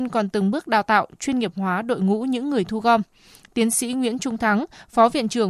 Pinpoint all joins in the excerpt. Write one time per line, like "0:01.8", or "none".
none